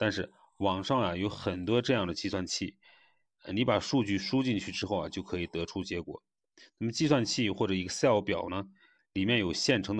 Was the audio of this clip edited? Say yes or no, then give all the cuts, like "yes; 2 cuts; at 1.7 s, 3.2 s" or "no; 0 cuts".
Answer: no; 0 cuts